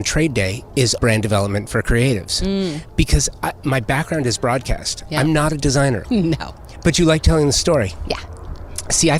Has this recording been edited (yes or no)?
yes